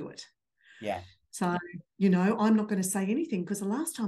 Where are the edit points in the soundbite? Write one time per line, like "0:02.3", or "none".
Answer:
none